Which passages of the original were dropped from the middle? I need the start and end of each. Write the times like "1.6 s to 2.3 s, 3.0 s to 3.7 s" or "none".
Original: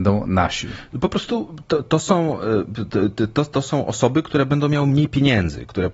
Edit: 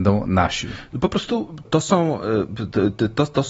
1.6 s to 1.8 s